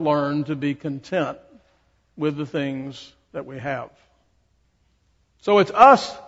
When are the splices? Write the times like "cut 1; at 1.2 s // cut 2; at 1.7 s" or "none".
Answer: none